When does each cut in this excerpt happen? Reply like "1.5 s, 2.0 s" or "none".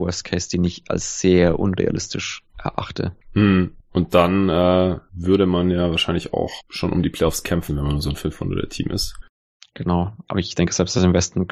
3.2 s, 7.7 s